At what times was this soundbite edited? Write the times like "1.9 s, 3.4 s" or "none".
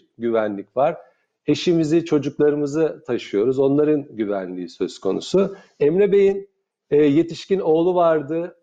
none